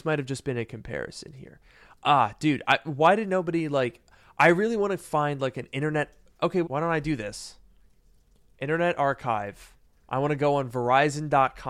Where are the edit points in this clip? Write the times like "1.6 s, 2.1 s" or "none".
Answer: 6.6 s, 10.0 s